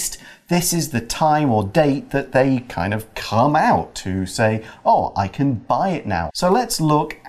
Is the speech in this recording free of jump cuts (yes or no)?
no